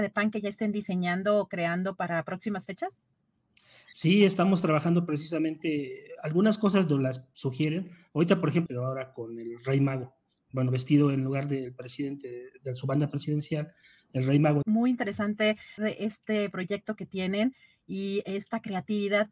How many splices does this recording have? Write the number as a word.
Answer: three